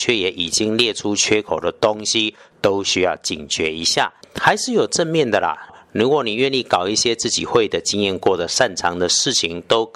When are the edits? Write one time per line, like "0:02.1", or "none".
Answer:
0:04.2
0:05.7